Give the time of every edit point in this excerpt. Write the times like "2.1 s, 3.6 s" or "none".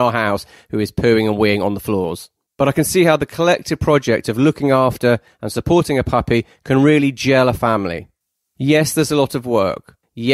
8.5 s

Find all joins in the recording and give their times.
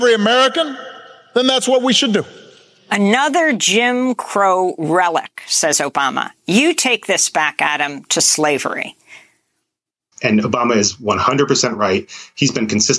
10.1 s

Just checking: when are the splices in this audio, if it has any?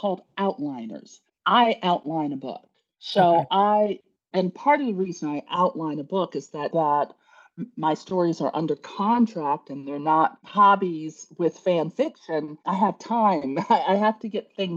4.3 s, 6.7 s

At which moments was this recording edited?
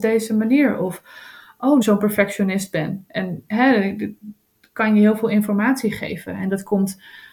1.8 s

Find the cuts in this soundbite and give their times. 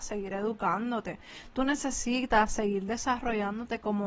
none

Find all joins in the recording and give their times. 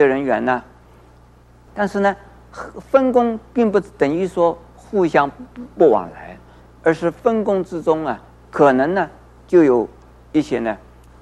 1.7 s

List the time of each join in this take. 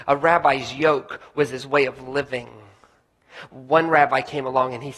none

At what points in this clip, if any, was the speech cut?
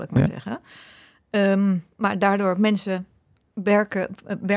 none

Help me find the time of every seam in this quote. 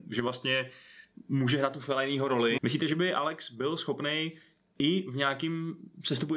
2.6 s

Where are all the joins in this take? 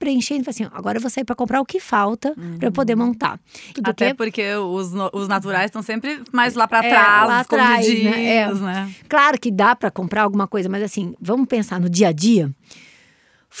3.7 s

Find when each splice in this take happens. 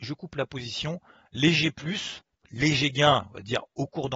2.4 s

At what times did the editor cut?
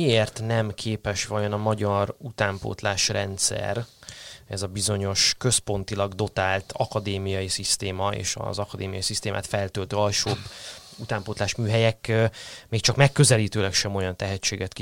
none

